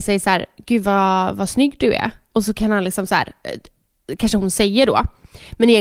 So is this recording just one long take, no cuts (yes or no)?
yes